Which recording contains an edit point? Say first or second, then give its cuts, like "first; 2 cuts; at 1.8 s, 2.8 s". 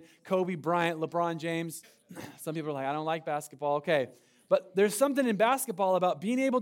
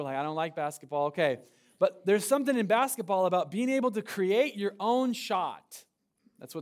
first; 1 cut; at 1.8 s